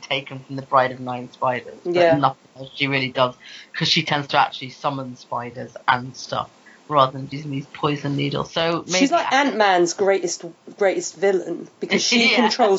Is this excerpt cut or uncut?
uncut